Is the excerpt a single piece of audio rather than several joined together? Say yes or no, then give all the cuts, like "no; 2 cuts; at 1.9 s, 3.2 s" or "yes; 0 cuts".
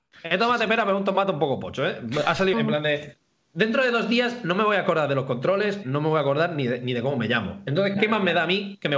no; 2 cuts; at 2.5 s, 5.8 s